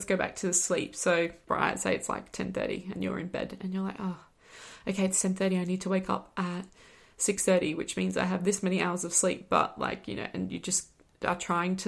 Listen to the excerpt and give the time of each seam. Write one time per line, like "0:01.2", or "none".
0:01.5